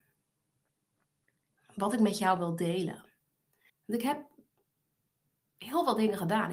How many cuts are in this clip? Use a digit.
1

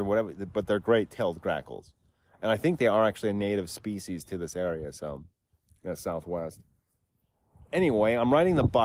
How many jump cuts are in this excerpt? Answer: 0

